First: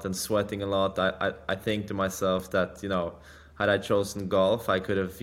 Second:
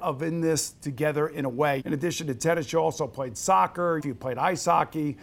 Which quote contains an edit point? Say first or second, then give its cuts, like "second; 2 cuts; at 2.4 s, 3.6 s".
second; 2 cuts; at 1.8 s, 4.0 s